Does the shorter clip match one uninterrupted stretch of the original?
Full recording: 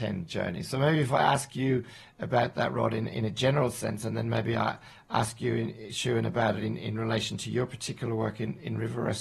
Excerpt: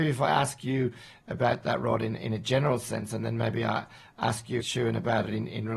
no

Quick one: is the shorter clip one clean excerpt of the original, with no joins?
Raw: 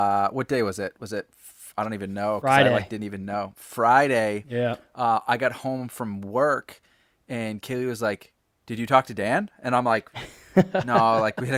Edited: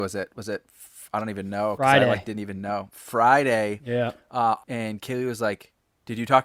no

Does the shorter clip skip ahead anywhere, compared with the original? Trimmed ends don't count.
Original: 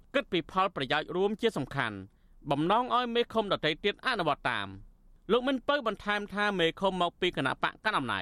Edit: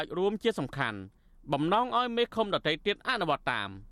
no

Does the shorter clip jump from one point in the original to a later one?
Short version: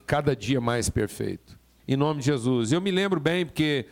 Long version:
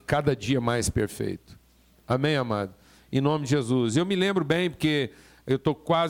yes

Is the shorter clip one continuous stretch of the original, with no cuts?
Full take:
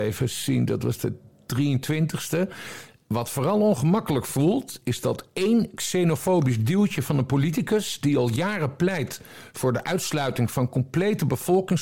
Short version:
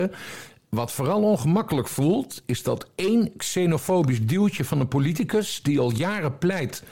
yes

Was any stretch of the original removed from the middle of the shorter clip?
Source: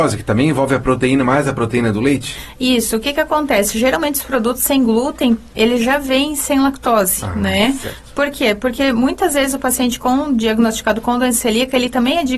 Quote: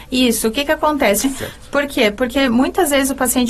yes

